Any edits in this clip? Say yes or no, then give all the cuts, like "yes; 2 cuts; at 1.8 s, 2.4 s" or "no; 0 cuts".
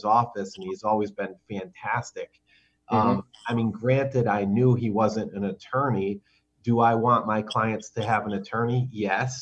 no; 0 cuts